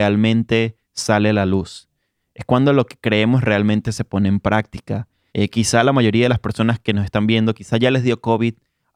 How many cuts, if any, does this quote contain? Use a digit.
1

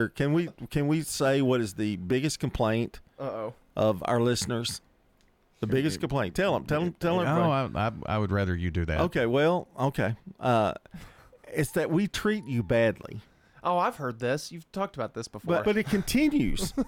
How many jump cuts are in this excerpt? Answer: 1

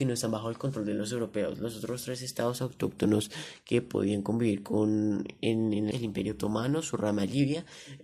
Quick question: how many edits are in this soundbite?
1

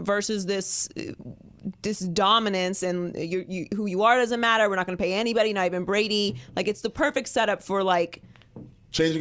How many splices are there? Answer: 0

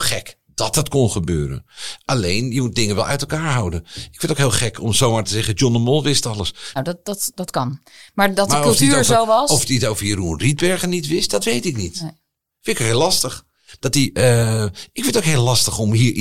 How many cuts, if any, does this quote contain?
2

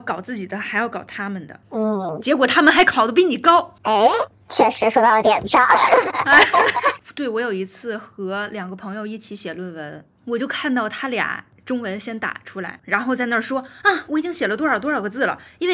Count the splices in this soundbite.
2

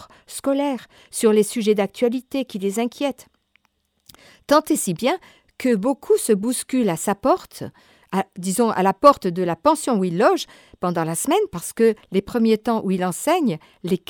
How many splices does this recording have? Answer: 0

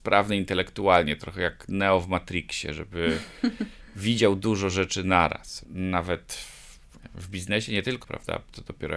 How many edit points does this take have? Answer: 2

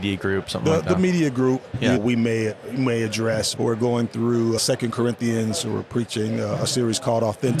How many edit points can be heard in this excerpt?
3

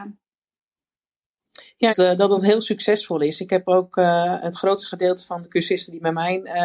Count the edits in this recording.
1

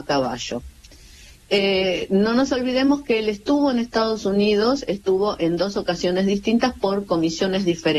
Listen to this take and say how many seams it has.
0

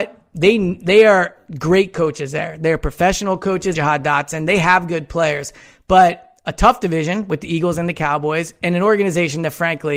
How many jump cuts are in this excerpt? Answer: 1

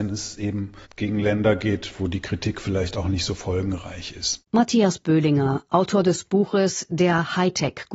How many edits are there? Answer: 1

